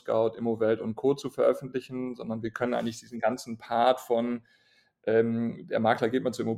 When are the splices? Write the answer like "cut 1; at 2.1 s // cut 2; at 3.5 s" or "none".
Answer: none